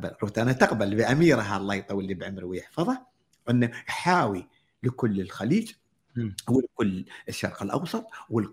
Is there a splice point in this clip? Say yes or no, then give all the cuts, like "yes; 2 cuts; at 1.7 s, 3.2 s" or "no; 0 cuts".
no; 0 cuts